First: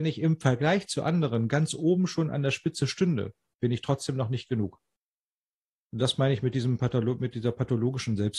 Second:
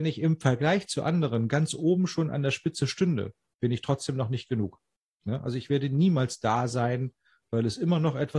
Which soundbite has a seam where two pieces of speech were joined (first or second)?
second